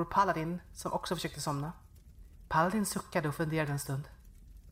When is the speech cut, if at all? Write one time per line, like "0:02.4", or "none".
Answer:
0:02.5